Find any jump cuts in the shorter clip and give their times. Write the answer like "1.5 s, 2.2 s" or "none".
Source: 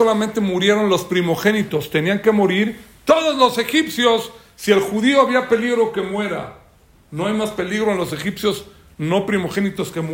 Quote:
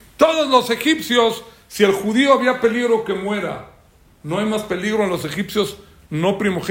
none